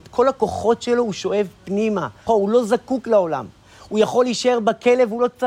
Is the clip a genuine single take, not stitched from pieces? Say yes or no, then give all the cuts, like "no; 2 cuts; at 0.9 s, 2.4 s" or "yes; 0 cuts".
no; 1 cut; at 2.3 s